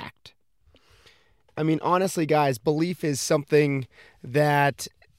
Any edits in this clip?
no; 0 cuts

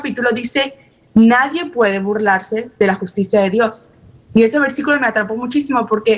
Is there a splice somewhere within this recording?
no; 0 cuts

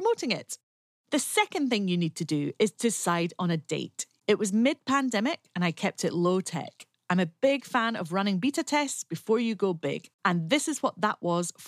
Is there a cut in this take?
yes; 2 cuts; at 4.2 s, 10.1 s

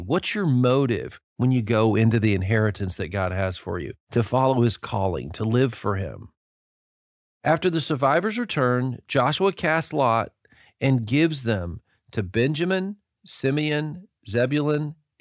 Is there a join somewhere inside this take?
no; 0 cuts

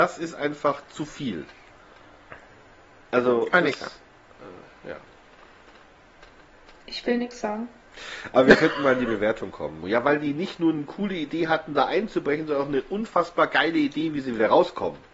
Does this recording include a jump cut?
yes; 1 cut; at 9.8 s

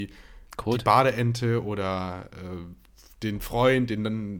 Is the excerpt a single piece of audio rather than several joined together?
yes; 0 cuts

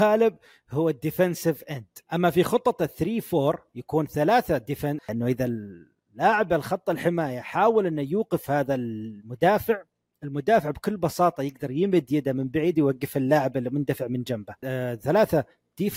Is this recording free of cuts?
no; 2 cuts; at 5.0 s, 14.6 s

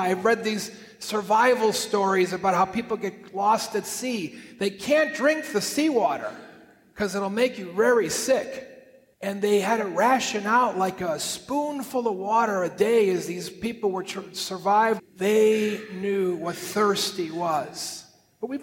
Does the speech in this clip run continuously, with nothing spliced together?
no; 2 cuts; at 9.1 s, 15.0 s

